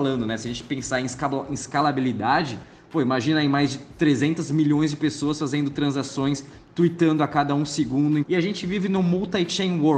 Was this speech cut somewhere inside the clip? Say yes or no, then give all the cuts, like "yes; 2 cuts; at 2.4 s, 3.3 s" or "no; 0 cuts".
yes; 1 cut; at 8.2 s